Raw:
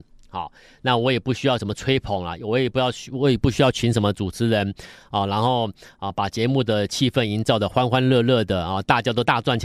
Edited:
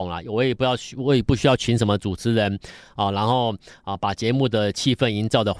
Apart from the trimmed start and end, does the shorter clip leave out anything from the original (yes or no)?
no